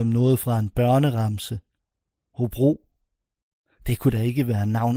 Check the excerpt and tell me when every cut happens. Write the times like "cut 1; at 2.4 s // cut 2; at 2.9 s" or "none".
none